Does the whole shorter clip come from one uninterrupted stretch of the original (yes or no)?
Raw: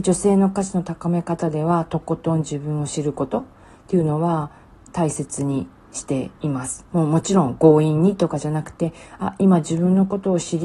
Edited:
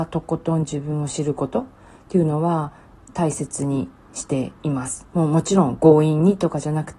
yes